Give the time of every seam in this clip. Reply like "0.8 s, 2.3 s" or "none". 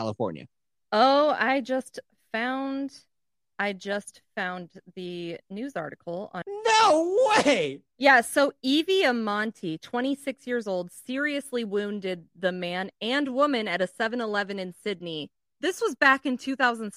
6.4 s